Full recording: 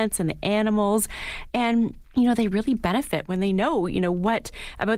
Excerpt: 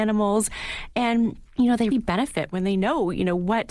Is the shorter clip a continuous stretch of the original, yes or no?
no